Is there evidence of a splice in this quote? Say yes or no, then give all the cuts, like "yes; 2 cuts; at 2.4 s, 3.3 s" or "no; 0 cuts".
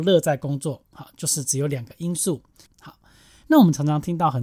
yes; 1 cut; at 2.7 s